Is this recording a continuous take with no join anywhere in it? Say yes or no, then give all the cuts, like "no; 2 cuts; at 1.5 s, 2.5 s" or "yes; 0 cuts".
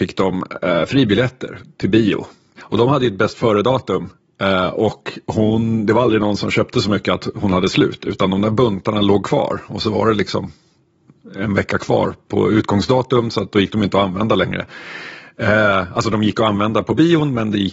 no; 1 cut; at 2.6 s